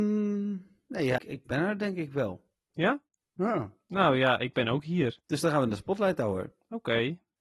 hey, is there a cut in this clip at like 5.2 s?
yes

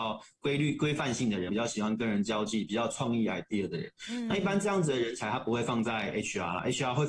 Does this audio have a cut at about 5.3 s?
no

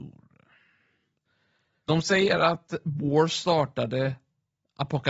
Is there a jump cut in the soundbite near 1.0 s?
no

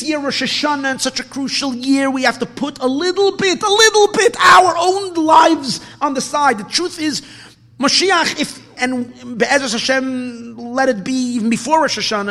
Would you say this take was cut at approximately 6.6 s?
no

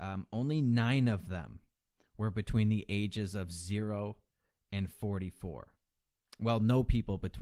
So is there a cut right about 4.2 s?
no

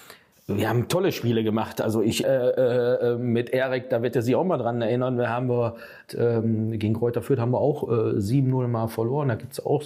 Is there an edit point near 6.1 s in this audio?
yes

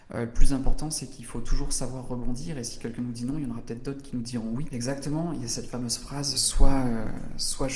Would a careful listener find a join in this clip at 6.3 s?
yes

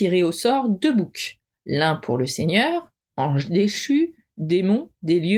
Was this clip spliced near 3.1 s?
yes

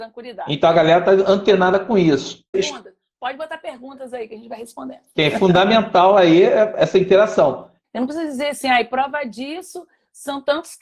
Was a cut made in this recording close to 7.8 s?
yes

